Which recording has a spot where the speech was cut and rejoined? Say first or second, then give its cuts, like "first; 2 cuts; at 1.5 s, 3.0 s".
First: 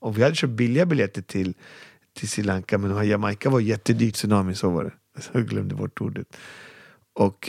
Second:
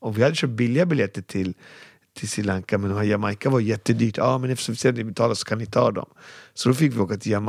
first; 1 cut; at 4.1 s